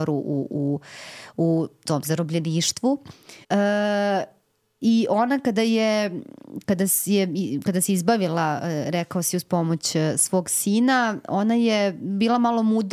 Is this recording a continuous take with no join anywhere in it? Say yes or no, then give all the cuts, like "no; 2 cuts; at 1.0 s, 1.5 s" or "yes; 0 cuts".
no; 1 cut; at 3.4 s